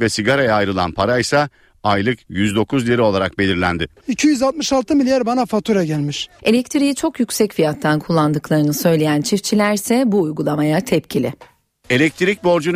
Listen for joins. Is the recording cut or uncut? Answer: cut